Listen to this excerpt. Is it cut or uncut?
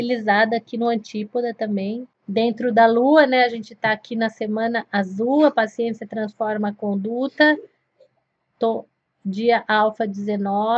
uncut